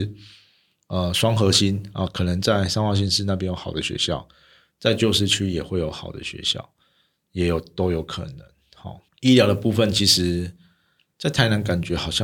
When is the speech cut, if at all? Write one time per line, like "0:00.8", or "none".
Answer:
0:09.1